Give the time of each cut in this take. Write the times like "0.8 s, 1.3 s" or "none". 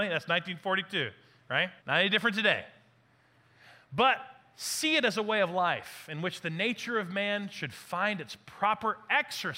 1.8 s